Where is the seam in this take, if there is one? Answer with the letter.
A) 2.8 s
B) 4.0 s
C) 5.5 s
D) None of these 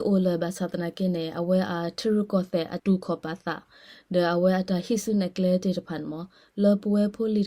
A